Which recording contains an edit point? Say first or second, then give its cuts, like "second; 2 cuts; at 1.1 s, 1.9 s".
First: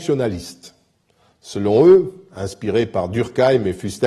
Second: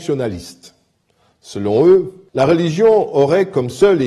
second; 1 cut; at 2.3 s